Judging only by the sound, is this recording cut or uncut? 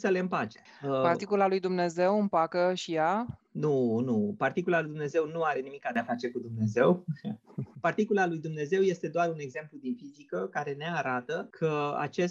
uncut